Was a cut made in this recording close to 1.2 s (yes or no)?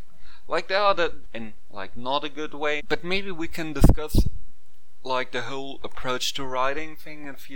yes